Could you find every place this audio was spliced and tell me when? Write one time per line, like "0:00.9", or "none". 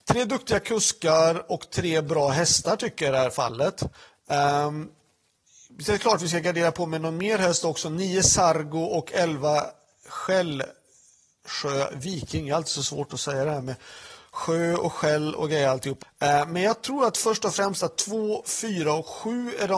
0:16.0